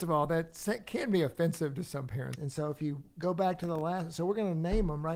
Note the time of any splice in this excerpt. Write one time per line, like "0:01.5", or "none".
0:02.4